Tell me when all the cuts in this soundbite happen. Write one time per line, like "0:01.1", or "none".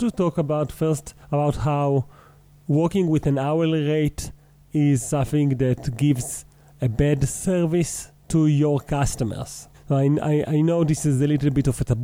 0:01.2
0:09.7